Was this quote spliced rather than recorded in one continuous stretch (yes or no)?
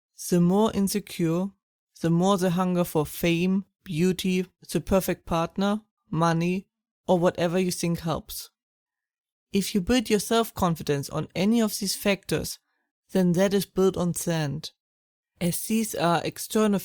yes